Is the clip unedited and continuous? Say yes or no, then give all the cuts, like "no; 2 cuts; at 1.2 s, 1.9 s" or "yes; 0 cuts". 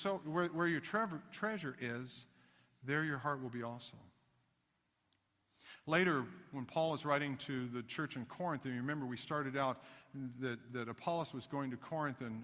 yes; 0 cuts